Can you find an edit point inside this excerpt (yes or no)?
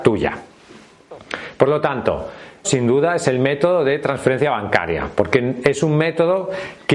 yes